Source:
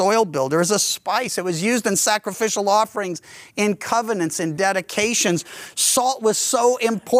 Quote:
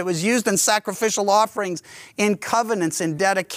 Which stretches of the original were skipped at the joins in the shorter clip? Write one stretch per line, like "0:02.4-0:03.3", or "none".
none